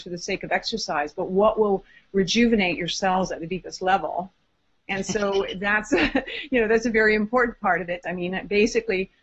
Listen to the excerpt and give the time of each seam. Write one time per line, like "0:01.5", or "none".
0:04.8
0:08.0